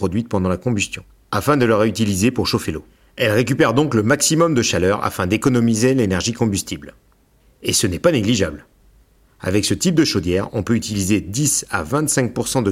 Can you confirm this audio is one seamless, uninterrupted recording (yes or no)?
yes